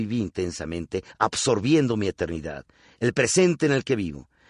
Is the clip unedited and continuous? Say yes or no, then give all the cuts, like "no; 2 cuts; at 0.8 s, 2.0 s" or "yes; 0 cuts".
yes; 0 cuts